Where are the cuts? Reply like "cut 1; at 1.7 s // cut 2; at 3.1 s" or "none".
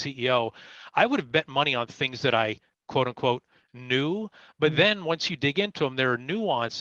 none